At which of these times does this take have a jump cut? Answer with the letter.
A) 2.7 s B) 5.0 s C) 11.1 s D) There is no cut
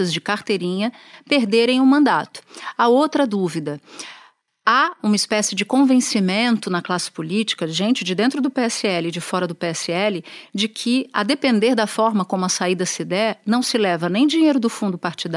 B